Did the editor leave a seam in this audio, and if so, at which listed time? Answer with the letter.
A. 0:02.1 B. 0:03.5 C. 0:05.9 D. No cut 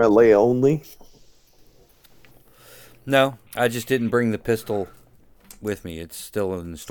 B